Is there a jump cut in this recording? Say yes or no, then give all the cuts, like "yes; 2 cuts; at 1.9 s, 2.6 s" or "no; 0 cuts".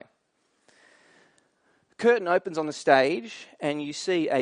no; 0 cuts